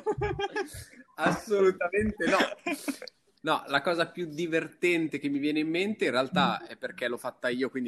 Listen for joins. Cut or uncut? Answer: cut